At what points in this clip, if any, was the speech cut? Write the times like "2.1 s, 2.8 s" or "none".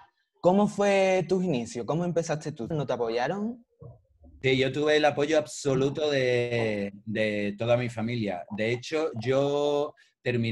2.7 s